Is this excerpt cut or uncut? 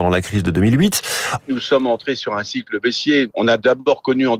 cut